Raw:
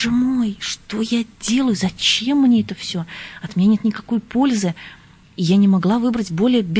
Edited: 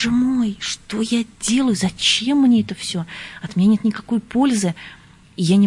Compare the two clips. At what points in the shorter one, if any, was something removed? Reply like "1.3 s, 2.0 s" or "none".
none